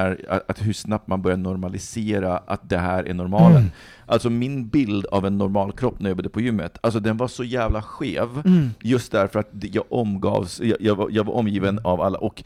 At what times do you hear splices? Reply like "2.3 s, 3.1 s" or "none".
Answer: none